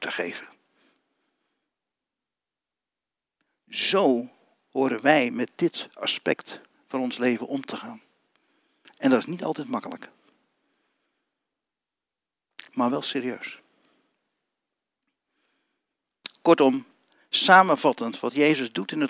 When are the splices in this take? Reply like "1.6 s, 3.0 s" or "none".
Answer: none